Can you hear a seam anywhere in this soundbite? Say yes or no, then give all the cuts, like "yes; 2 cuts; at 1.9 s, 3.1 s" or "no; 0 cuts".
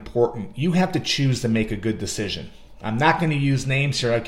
no; 0 cuts